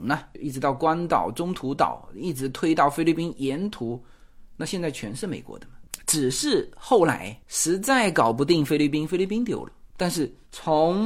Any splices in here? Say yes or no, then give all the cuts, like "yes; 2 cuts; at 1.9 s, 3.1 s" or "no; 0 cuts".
no; 0 cuts